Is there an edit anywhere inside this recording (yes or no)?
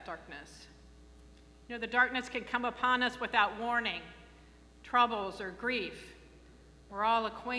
no